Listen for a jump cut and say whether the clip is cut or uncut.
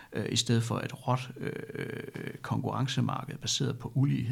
uncut